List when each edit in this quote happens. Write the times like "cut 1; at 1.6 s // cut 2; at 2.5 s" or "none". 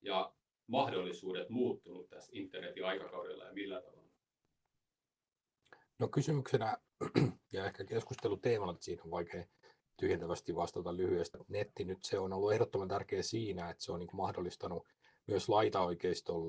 cut 1; at 8.8 s // cut 2; at 11.3 s